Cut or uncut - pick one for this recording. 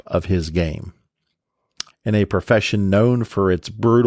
cut